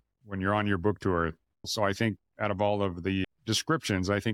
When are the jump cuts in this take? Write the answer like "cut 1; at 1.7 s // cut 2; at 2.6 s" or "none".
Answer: cut 1; at 1.6 s // cut 2; at 3.2 s

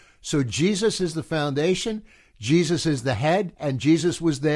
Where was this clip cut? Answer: cut 1; at 3.5 s

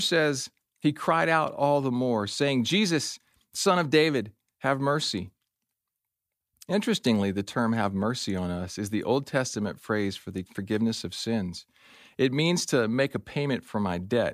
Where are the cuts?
none

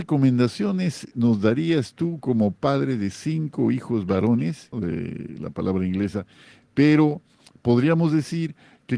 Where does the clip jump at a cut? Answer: cut 1; at 4.7 s

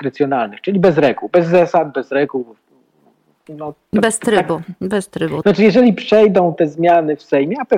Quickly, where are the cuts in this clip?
cut 1; at 5.4 s

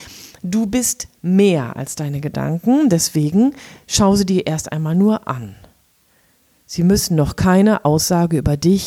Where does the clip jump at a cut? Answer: none

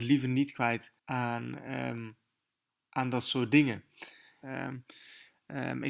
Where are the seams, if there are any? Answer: cut 1; at 1.0 s // cut 2; at 4.4 s

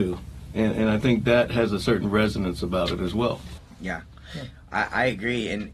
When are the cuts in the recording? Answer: none

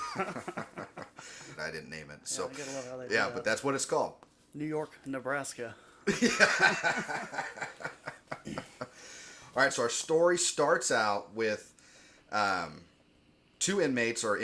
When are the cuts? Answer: cut 1; at 1.6 s

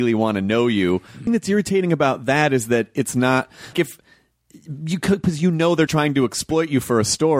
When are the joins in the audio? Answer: cut 1; at 1.3 s // cut 2; at 3.7 s // cut 3; at 5.9 s

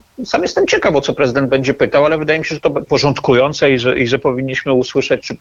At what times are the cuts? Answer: cut 1; at 2.9 s

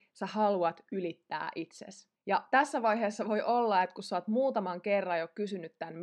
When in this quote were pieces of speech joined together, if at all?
none

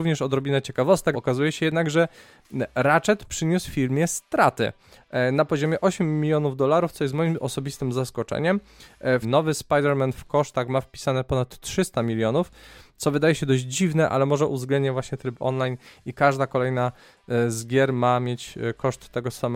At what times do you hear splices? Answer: cut 1; at 1.1 s // cut 2; at 9.2 s

